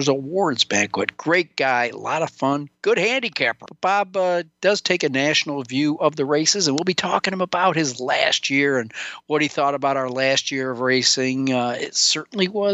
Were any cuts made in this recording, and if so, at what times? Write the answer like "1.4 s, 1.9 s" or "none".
3.7 s